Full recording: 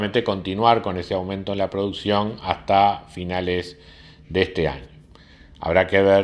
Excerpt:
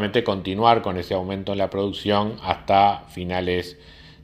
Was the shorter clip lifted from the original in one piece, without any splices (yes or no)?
yes